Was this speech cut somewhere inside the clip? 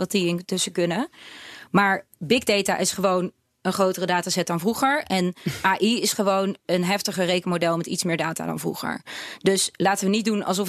no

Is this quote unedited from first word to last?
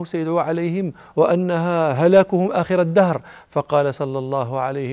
no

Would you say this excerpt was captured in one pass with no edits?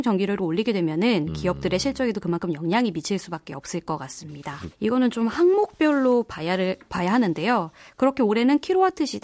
no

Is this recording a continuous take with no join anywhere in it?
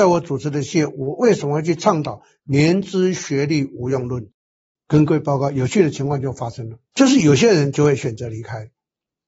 no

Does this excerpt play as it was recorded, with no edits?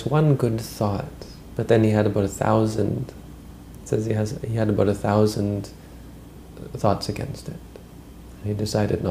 yes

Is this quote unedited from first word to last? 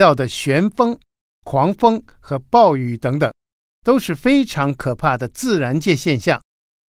no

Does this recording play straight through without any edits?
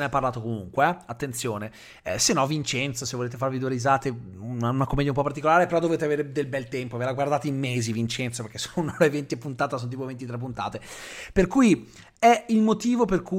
yes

